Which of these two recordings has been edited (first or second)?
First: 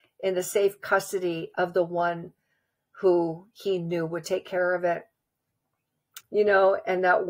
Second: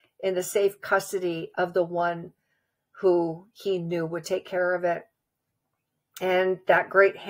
first